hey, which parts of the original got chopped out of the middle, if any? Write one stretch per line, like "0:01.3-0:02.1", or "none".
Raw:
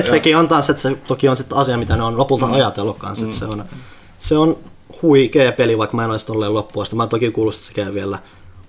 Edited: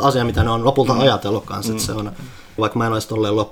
0:04.1-0:05.8